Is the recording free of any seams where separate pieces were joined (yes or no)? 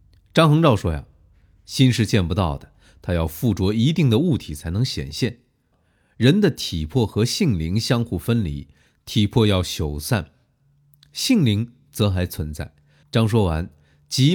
no